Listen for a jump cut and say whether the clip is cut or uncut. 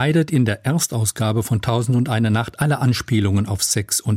uncut